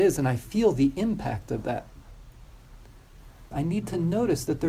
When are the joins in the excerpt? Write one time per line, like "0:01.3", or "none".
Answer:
0:03.5